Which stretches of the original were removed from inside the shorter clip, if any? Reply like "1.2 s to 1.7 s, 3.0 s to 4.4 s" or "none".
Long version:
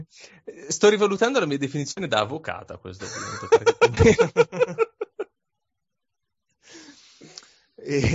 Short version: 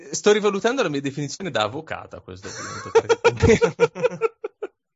none